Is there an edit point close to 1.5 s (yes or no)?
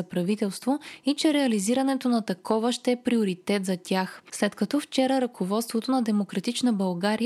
no